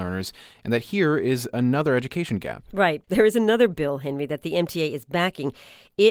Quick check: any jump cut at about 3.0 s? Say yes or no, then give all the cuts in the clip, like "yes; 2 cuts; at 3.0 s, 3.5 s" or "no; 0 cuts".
yes; 1 cut; at 3.0 s